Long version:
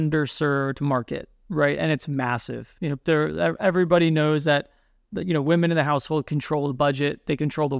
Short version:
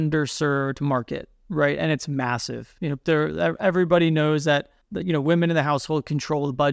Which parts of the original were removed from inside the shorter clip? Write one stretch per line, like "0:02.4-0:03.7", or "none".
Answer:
0:04.8-0:05.0